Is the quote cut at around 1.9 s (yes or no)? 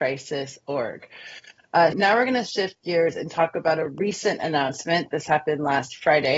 yes